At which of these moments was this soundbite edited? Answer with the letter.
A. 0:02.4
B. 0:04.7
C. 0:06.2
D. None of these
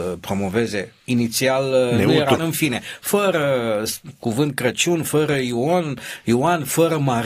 A